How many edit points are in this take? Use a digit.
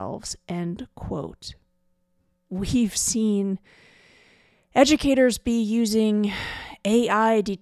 1